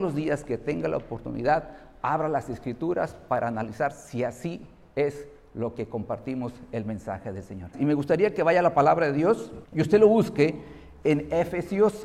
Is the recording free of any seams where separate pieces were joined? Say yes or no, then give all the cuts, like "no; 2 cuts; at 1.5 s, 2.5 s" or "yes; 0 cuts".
no; 2 cuts; at 7.7 s, 9.6 s